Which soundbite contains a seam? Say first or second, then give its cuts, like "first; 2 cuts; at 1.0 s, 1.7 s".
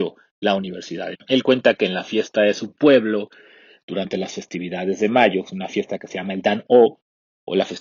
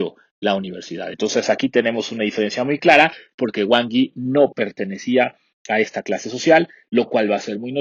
first; 1 cut; at 1.1 s